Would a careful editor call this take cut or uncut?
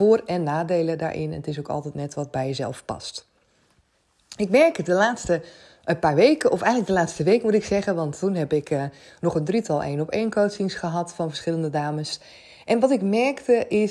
uncut